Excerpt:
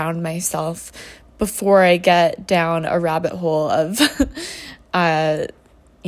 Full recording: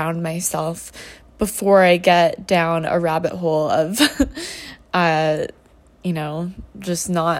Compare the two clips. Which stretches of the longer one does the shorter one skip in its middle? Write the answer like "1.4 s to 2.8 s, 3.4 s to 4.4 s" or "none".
none